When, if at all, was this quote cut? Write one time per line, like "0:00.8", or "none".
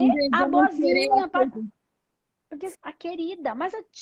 0:01.5
0:02.7